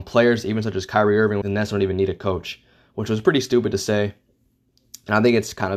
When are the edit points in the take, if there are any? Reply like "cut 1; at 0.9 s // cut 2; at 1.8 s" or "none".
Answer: cut 1; at 1.4 s